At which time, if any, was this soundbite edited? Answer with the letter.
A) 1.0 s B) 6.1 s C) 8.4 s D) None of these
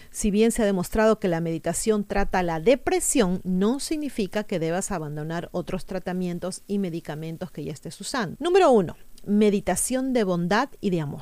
C